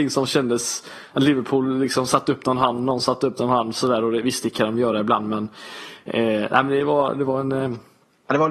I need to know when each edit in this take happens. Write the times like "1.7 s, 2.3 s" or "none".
none